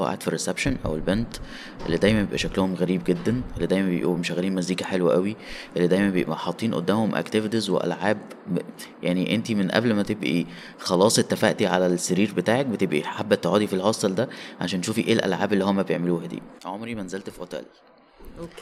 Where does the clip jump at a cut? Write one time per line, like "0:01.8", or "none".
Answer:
0:16.6